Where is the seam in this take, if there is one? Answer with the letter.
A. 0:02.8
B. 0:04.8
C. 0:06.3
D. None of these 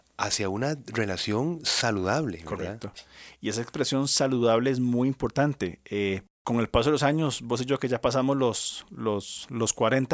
C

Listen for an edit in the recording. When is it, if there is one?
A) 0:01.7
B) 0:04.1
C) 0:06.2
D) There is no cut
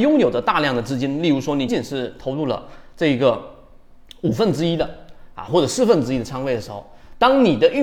A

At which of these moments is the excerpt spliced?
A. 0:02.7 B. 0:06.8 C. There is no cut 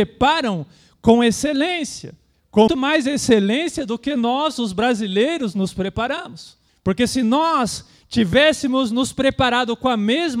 A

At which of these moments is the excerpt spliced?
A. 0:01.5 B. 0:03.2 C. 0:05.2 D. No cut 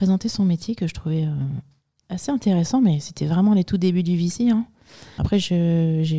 C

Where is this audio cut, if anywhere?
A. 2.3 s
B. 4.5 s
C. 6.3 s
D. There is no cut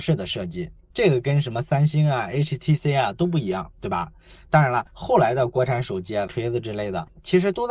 C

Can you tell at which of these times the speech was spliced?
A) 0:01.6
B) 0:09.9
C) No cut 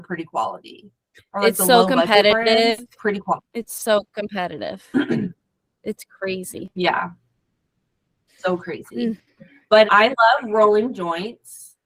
B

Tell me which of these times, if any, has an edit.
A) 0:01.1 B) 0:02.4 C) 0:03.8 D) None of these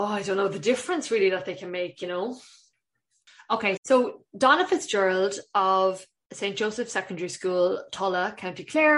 C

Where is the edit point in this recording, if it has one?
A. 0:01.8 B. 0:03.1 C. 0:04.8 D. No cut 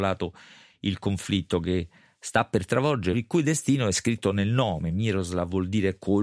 B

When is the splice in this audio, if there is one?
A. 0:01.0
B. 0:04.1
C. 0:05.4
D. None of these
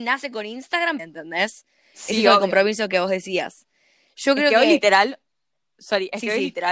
A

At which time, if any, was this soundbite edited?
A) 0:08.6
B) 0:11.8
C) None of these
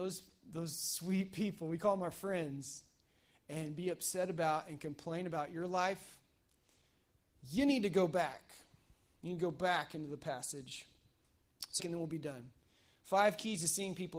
B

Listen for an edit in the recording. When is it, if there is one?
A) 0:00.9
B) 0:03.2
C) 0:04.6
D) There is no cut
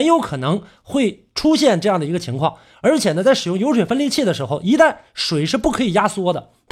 D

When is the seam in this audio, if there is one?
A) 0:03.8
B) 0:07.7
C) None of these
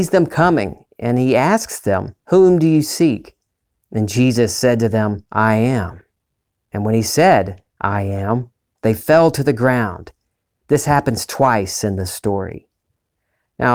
A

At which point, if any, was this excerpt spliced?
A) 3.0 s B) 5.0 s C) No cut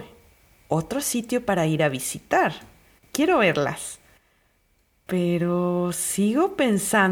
A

